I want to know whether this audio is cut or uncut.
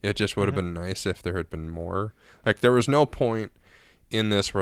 uncut